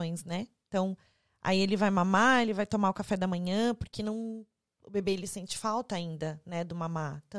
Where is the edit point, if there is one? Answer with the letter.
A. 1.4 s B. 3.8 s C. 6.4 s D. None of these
D